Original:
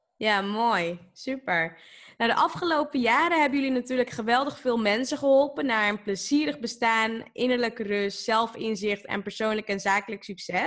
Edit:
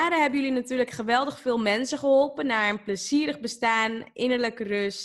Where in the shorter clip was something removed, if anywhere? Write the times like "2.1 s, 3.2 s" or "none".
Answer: none